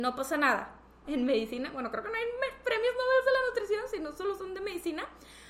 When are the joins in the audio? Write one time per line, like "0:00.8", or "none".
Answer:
0:01.0